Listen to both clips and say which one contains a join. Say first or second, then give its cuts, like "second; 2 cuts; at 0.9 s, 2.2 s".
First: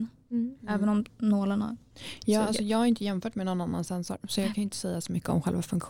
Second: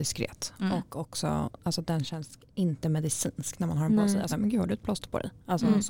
second; 1 cut; at 4.3 s